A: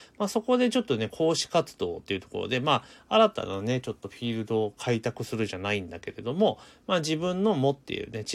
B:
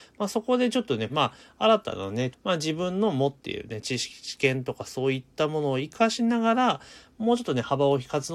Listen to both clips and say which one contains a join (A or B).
B